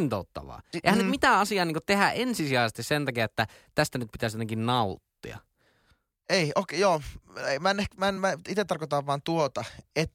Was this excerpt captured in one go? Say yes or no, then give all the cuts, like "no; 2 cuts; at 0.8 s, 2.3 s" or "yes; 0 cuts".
yes; 0 cuts